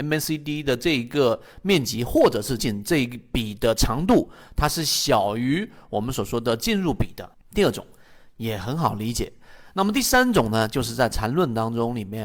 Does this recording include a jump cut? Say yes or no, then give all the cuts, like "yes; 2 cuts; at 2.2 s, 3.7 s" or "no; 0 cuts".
yes; 2 cuts; at 2.6 s, 7.3 s